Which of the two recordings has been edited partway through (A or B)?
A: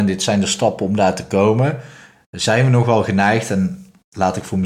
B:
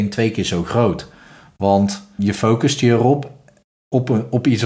B